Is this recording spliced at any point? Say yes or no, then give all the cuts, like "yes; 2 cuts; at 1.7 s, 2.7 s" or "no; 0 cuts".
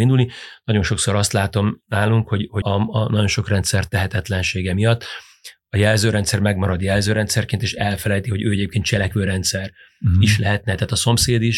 yes; 1 cut; at 2.6 s